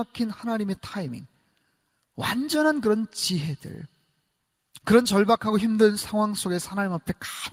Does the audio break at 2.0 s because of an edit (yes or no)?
no